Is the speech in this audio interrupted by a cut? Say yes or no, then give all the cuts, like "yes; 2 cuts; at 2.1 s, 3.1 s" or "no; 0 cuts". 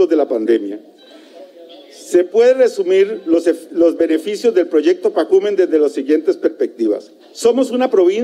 yes; 1 cut; at 7.2 s